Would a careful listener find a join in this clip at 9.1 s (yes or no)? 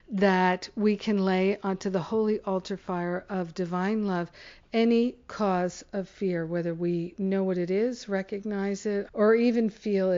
yes